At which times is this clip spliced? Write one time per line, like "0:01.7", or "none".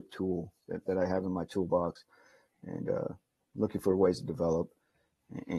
none